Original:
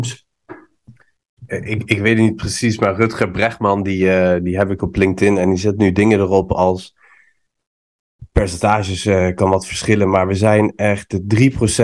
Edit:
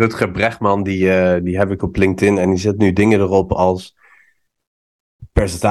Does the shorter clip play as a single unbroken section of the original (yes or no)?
yes